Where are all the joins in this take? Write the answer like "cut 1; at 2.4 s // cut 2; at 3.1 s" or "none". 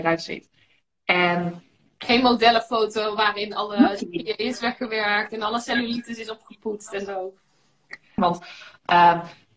cut 1; at 8.2 s